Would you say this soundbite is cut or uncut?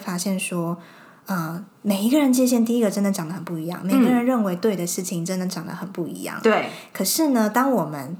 uncut